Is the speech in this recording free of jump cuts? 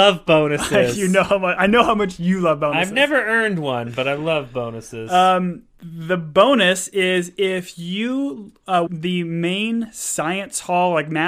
no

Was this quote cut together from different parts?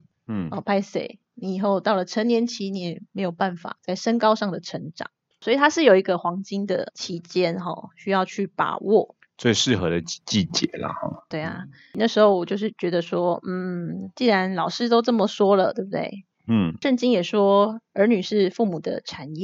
no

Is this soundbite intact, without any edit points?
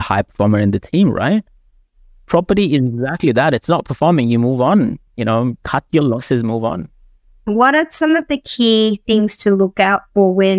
yes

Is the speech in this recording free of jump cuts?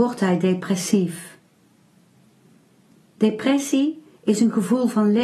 yes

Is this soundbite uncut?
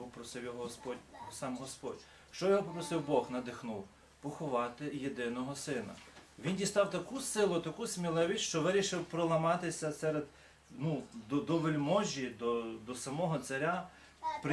yes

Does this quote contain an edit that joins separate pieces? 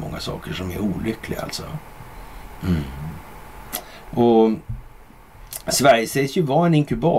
yes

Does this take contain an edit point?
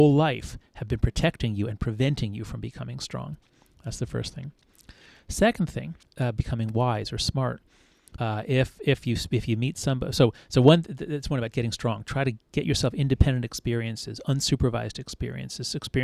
yes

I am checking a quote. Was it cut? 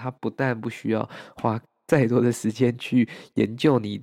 no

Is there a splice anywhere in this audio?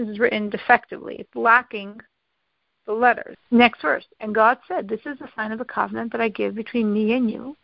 yes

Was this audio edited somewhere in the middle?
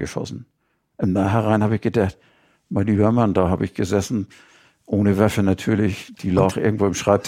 no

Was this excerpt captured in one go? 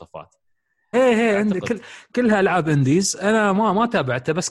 no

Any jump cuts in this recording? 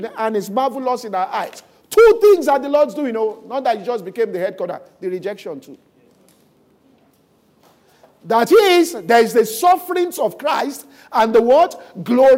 no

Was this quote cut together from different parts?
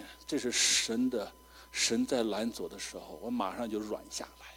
no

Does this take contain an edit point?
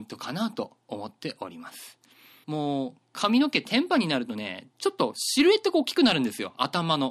yes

